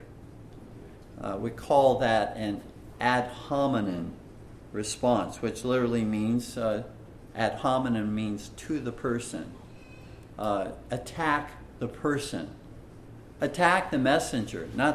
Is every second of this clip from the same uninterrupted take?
yes; 0 cuts

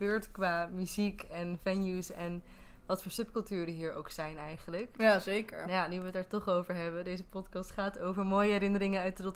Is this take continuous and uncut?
yes; 0 cuts

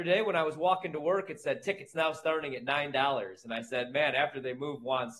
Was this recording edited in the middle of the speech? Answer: no; 0 cuts

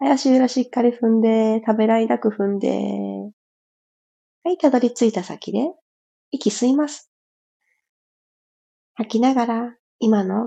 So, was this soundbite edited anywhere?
no; 0 cuts

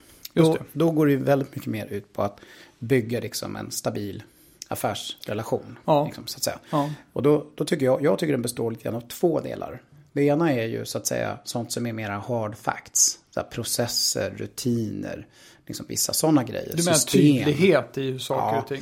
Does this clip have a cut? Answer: no; 0 cuts

